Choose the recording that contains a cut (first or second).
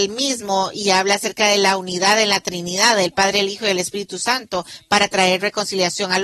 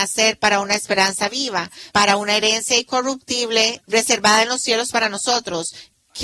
second